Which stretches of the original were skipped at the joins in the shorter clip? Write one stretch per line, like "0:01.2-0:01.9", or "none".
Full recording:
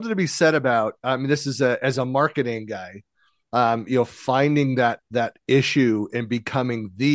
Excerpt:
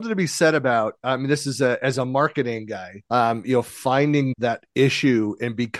0:03.1-0:03.5
0:04.7-0:05.0